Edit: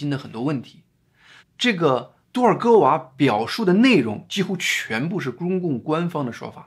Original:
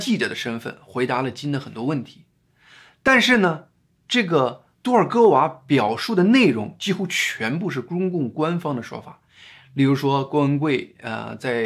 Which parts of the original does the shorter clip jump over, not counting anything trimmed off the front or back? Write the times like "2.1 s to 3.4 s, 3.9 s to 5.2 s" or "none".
2.8 s to 3.9 s